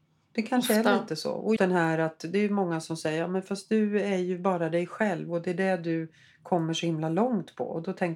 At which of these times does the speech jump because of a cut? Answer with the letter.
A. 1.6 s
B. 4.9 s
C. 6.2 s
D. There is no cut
A